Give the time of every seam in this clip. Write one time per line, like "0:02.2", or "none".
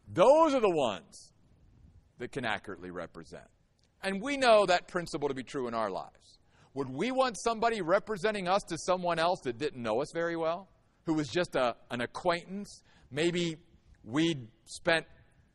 none